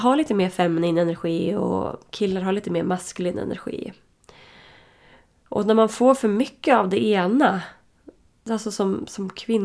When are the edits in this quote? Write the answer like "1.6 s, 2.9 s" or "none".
none